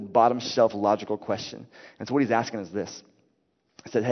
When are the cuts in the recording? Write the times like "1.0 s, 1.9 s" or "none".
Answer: none

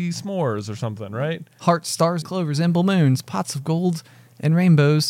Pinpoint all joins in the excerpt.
2.2 s

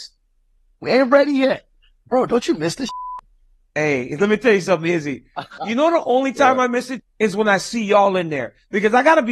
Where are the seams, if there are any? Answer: 5.6 s, 7.0 s

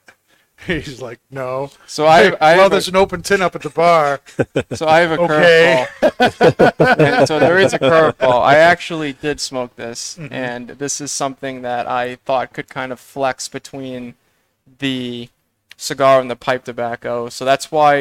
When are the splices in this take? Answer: none

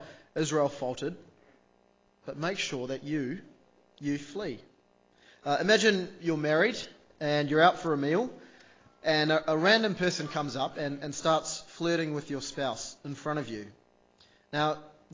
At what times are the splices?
none

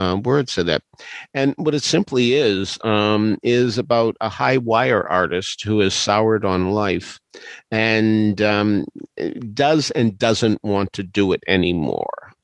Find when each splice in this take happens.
none

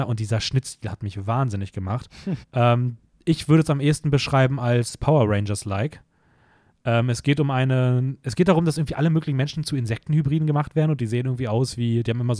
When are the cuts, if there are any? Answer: 2.4 s

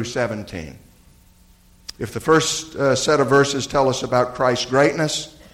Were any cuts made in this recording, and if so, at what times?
1.9 s

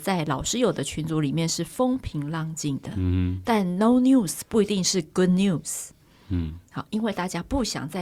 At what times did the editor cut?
none

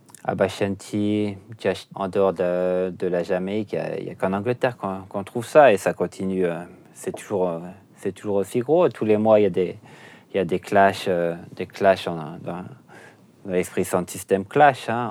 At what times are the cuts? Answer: 1.9 s

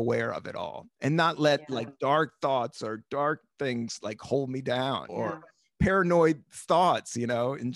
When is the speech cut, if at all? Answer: 5.1 s

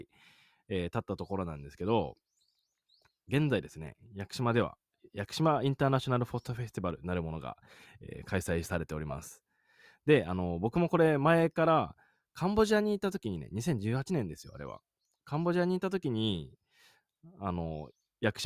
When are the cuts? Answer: 5.0 s

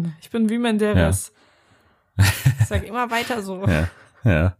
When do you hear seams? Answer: none

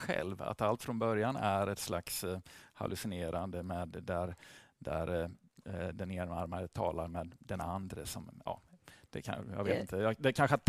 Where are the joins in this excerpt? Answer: none

